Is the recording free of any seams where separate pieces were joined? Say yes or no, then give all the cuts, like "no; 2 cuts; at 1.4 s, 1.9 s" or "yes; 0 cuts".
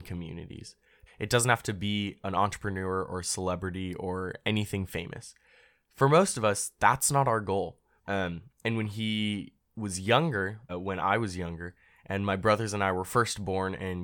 no; 3 cuts; at 1.1 s, 8.0 s, 10.7 s